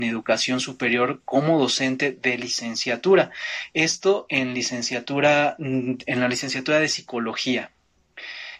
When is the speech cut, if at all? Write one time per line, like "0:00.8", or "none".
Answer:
none